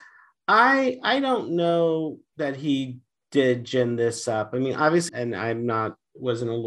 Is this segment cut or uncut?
cut